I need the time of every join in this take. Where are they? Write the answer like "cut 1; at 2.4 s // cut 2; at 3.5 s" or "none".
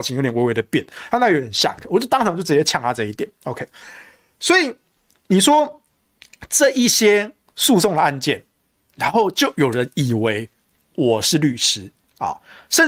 none

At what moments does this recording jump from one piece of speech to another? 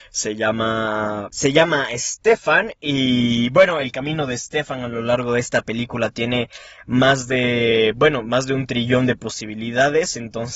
none

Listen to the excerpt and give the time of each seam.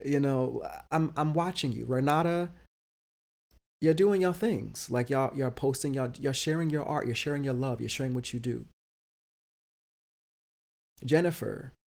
none

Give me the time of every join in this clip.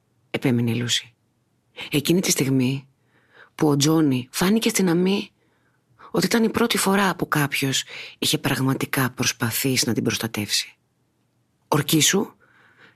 cut 1; at 4.3 s // cut 2; at 11.6 s

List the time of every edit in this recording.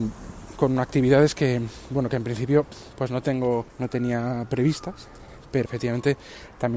cut 1; at 3.7 s // cut 2; at 5.7 s

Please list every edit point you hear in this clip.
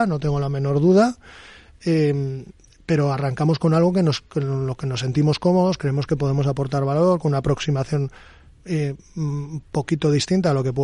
none

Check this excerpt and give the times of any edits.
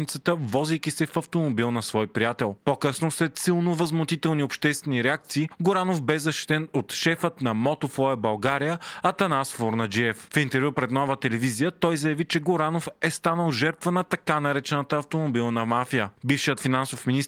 none

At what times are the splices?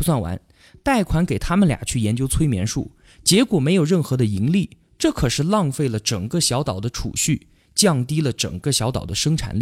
none

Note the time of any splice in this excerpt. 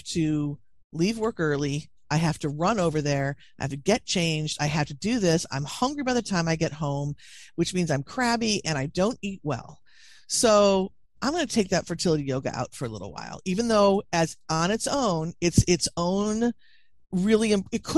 none

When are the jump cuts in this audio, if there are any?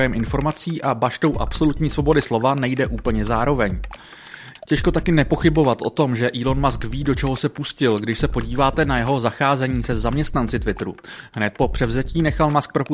none

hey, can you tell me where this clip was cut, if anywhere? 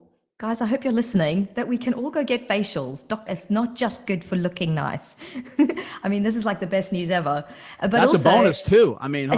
cut 1; at 3.3 s

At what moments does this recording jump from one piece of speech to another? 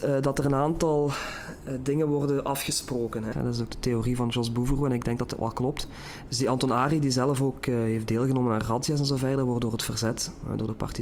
cut 1; at 3.3 s // cut 2; at 6.3 s

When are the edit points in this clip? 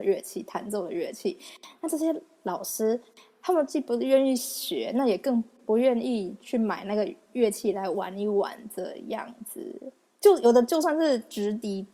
none

